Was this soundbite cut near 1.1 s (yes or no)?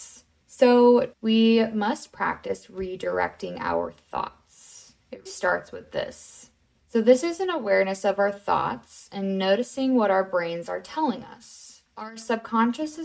yes